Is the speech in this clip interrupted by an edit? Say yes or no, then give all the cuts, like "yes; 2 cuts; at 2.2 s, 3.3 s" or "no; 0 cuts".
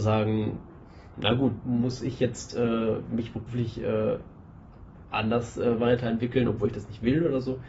yes; 1 cut; at 1.6 s